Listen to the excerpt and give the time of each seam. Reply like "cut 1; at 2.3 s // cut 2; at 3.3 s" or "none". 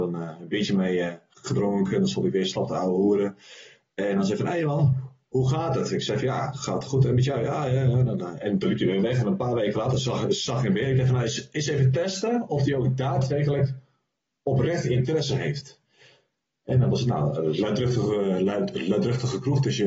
none

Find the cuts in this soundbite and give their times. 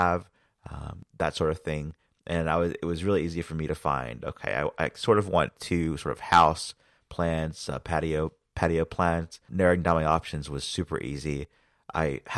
cut 1; at 9.5 s

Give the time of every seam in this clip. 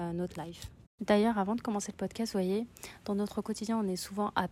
none

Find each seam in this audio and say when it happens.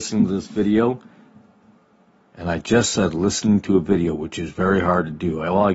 none

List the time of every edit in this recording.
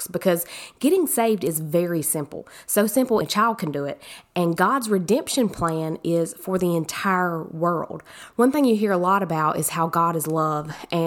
cut 1; at 3.2 s // cut 2; at 8.3 s

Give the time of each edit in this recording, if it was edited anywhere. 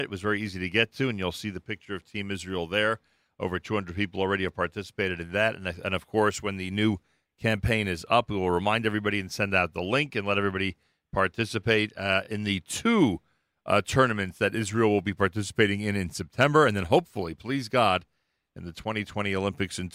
none

